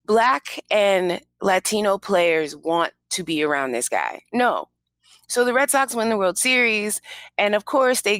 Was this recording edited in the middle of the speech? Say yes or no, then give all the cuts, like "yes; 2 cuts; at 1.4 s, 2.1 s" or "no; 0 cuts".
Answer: no; 0 cuts